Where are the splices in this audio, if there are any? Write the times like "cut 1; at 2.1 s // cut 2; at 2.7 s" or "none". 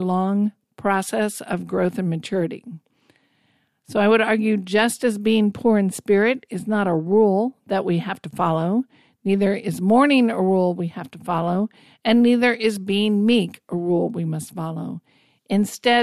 none